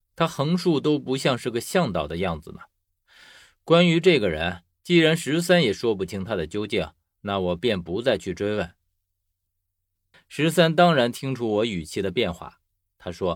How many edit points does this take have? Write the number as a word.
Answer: one